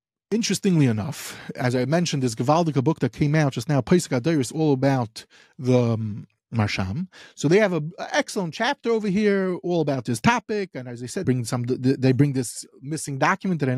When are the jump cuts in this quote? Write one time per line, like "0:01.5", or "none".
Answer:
0:11.2